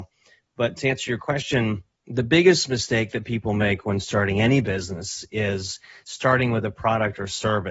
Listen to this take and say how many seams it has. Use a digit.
0